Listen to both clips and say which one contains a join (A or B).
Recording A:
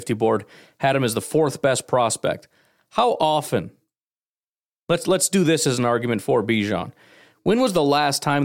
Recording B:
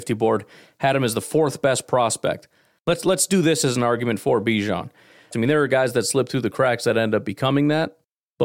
B